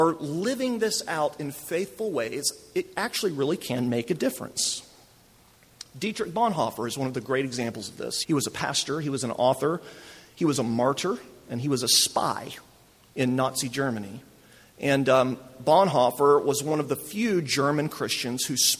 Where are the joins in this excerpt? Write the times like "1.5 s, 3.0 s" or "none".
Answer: 8.2 s